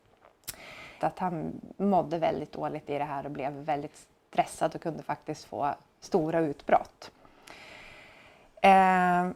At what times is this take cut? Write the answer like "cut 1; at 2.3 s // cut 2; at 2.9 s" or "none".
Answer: cut 1; at 1.0 s